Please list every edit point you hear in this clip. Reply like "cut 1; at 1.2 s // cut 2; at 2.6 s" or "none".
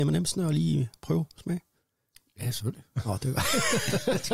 none